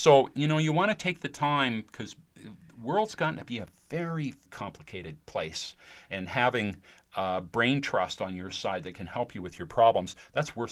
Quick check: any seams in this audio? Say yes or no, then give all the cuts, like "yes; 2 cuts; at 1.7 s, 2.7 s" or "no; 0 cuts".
yes; 1 cut; at 4.5 s